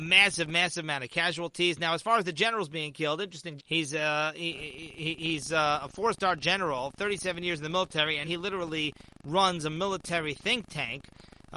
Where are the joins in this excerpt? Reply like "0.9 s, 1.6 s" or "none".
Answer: 3.6 s, 8.2 s